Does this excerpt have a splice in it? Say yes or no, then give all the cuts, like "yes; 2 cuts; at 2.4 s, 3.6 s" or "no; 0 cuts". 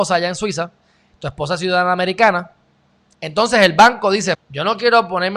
yes; 1 cut; at 4.3 s